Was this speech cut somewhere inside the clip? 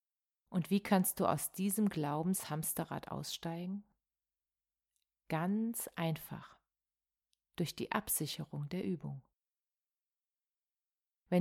no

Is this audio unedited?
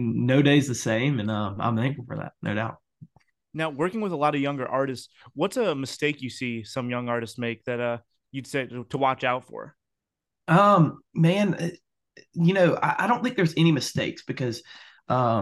yes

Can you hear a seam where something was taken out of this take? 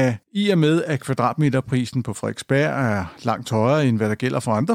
no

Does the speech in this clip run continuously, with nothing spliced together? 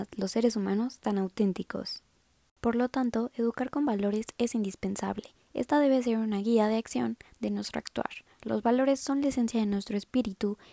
yes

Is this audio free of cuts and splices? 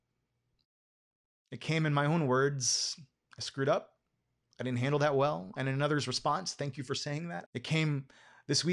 no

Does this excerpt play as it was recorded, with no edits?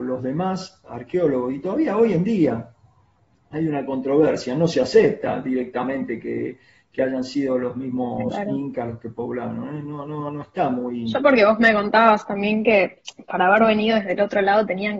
yes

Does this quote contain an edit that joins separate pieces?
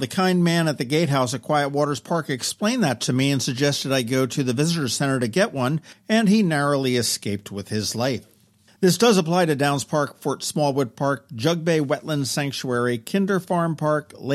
no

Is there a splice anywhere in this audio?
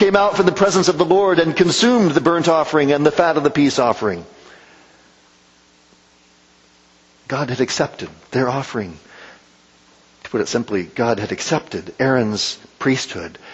no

